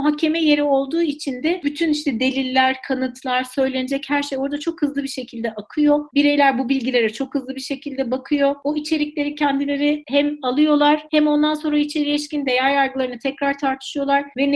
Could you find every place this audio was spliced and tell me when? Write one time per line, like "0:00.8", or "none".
none